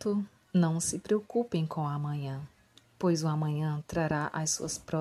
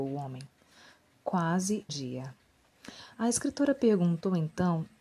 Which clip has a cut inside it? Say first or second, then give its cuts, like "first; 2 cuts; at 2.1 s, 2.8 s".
second; 1 cut; at 1.9 s